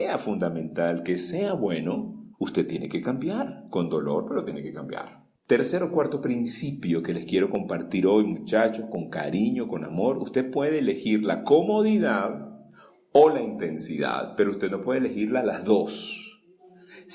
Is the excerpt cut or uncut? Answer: cut